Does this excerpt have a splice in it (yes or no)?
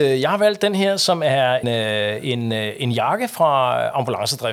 yes